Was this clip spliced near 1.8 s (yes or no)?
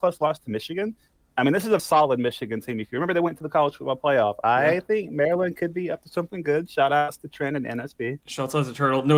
yes